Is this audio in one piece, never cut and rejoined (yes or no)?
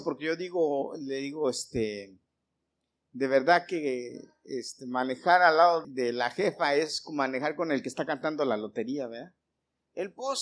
no